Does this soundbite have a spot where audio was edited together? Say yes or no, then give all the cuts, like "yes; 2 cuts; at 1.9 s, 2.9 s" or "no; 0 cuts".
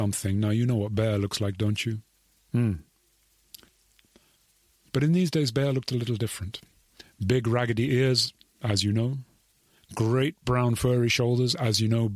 no; 0 cuts